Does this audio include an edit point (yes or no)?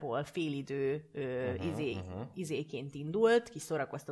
no